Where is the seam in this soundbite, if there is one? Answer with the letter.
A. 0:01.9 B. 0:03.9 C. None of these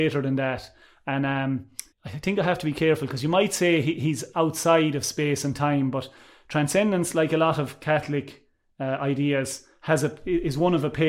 A